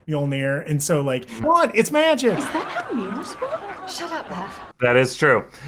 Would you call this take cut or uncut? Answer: cut